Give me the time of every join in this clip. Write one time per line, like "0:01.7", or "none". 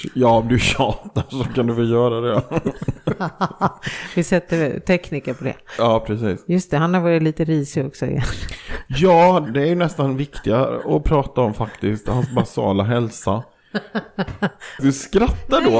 0:09.5
0:14.8